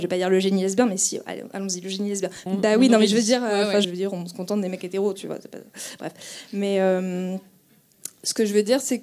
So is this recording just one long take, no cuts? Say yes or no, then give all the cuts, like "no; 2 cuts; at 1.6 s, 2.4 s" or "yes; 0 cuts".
no; 2 cuts; at 2.5 s, 3.8 s